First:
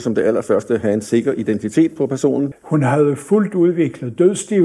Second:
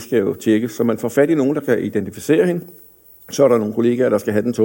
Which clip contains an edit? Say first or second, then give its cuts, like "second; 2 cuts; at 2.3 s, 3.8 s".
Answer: first; 1 cut; at 2.5 s